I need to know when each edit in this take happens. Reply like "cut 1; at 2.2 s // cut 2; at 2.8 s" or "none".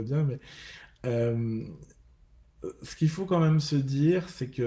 none